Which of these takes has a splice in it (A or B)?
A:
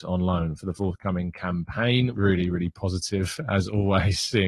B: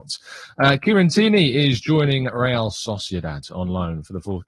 A